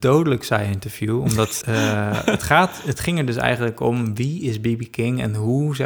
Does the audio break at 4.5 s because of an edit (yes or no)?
no